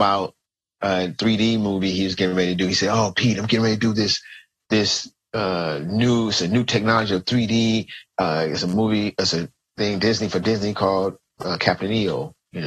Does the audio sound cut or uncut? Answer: uncut